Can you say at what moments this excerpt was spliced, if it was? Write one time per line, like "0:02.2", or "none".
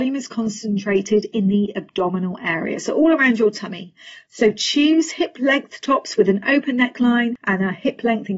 none